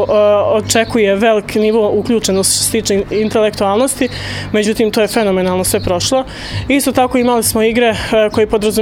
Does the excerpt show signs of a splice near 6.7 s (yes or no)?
no